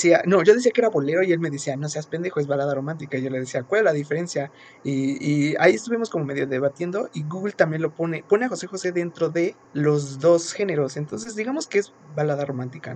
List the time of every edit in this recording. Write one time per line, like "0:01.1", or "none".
0:09.6